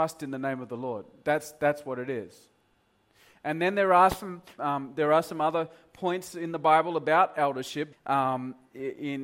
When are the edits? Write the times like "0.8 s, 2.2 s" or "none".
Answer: 4.6 s, 7.9 s